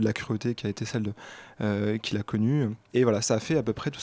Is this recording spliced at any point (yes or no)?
yes